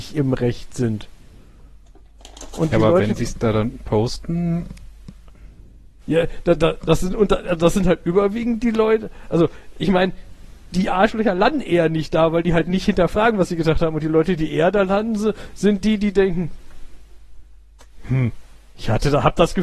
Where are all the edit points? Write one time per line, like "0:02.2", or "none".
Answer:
none